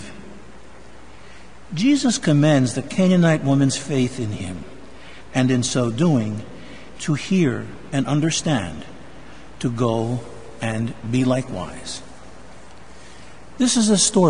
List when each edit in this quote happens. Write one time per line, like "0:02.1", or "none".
0:07.0